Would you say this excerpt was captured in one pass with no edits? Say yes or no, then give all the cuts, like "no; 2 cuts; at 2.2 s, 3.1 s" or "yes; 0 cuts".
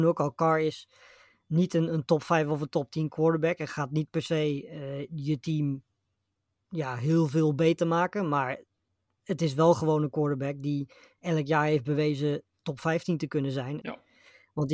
no; 1 cut; at 13.8 s